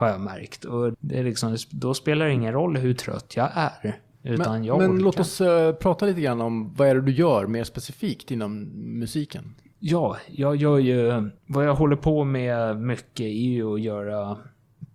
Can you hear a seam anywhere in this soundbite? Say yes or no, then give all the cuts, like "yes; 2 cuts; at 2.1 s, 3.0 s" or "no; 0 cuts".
yes; 2 cuts; at 0.9 s, 11.4 s